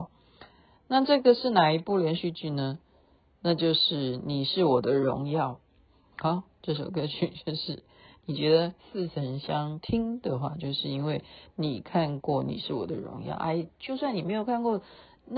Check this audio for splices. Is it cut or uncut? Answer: uncut